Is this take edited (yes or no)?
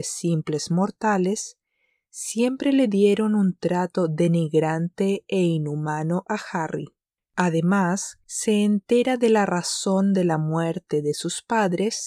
yes